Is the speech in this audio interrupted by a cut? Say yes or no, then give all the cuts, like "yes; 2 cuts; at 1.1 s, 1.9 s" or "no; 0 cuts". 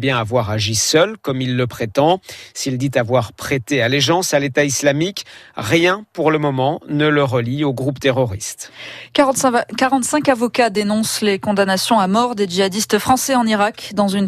no; 0 cuts